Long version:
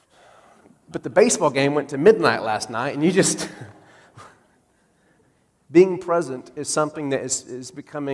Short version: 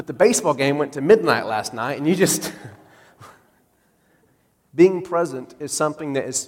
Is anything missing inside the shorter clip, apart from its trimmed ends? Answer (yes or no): no